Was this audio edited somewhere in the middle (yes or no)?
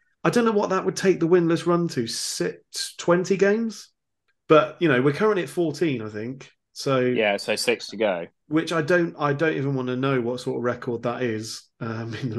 no